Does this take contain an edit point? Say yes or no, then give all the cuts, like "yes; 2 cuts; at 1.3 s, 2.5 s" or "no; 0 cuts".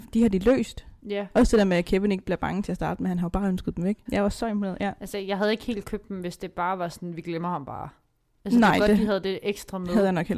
yes; 1 cut; at 4.1 s